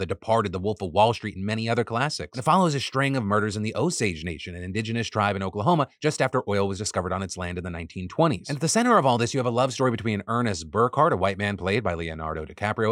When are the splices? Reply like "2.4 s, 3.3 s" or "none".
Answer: none